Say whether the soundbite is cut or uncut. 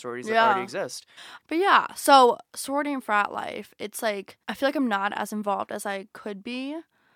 cut